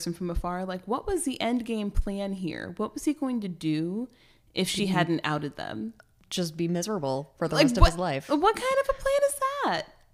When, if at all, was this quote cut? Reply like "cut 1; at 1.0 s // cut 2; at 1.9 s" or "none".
none